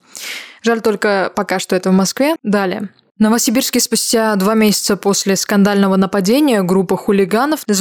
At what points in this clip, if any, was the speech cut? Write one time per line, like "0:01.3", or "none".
0:02.4